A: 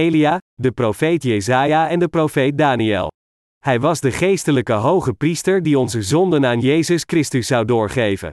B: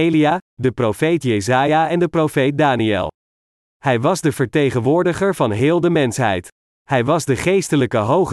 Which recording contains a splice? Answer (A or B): A